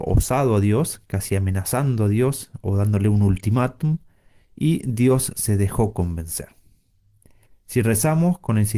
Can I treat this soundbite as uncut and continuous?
no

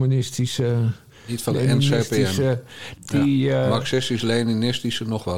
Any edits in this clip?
yes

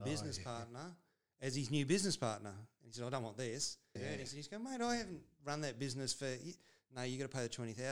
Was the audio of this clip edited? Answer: yes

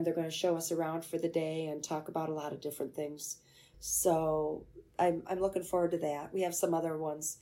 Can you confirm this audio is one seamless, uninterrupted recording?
no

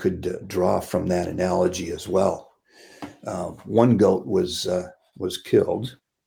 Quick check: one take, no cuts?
yes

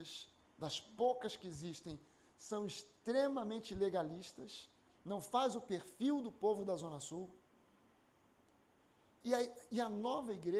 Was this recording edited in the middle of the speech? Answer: no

